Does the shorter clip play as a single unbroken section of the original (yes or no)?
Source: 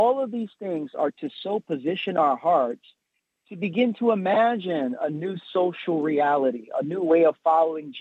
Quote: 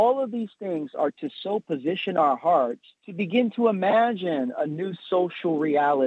no